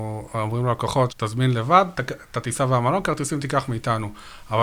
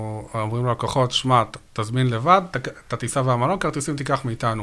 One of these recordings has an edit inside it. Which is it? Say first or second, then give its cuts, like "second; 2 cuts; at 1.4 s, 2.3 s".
first; 1 cut; at 1.1 s